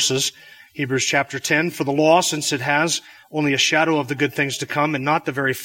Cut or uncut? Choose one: uncut